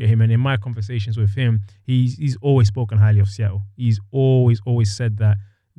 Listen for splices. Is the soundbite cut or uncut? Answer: uncut